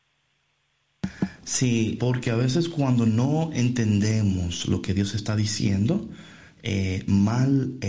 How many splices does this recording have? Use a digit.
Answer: 1